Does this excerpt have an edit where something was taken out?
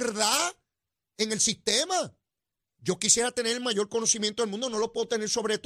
yes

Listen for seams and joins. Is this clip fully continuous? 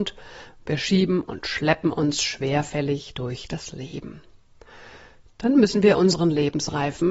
yes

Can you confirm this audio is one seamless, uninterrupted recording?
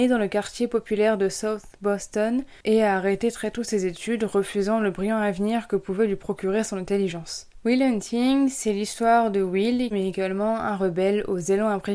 no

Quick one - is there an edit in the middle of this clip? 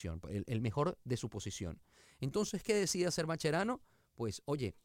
no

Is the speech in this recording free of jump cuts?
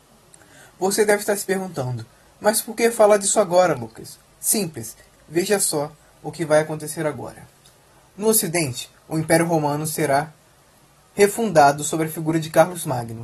no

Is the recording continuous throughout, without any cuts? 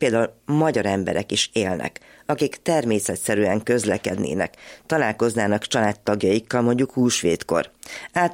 yes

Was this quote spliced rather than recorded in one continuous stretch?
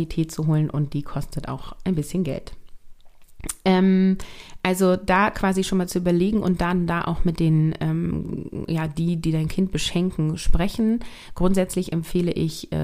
no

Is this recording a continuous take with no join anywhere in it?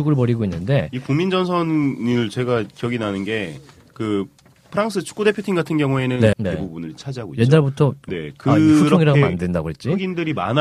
no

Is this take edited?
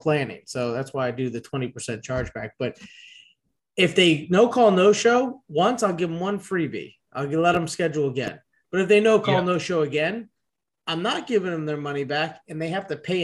no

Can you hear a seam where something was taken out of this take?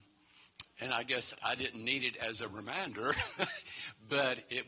yes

